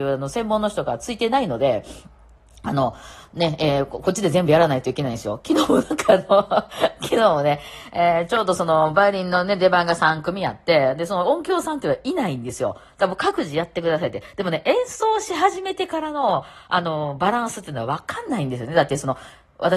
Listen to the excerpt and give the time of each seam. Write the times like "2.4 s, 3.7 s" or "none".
none